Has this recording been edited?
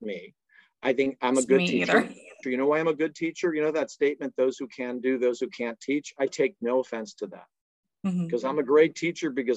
yes; 1 cut; at 2.4 s

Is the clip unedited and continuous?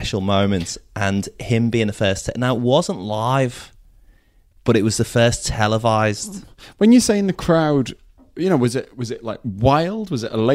yes; 0 cuts

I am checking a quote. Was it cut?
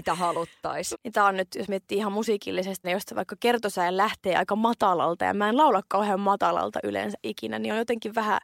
yes; 2 cuts; at 0.9 s, 2.8 s

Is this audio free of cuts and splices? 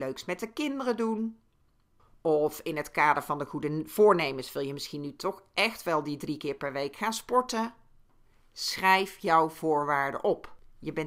yes; 0 cuts

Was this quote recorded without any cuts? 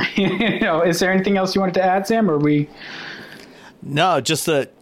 yes; 0 cuts

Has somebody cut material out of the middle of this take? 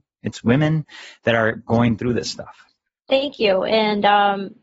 no; 0 cuts

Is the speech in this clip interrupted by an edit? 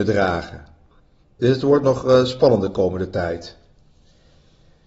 no; 0 cuts

